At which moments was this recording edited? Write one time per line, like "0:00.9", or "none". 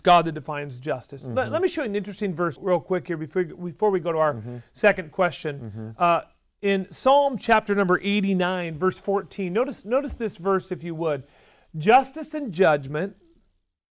0:02.6